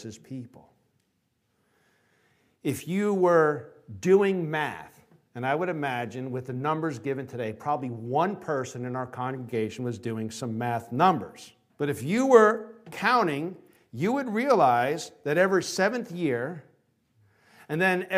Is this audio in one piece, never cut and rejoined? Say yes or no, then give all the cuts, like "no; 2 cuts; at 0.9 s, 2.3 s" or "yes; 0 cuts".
no; 1 cut; at 11.7 s